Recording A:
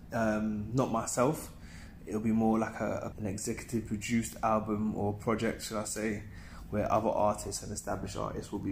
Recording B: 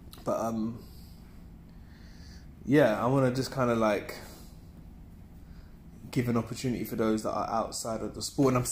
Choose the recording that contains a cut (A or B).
A